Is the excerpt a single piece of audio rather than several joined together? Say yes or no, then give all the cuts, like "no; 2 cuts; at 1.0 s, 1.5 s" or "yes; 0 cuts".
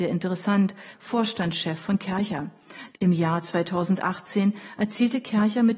no; 2 cuts; at 0.9 s, 2.9 s